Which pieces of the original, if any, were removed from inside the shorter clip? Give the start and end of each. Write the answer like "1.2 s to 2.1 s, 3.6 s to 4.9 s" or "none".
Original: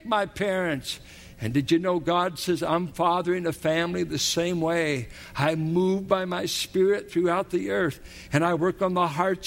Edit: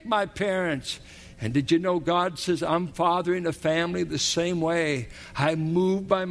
none